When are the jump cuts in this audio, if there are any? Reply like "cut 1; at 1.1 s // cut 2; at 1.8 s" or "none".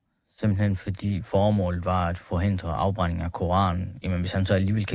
none

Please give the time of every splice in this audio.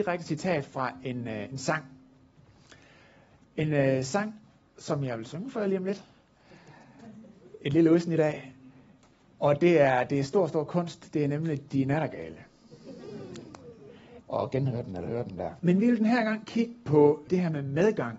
cut 1; at 14.2 s // cut 2; at 15.6 s // cut 3; at 17.3 s

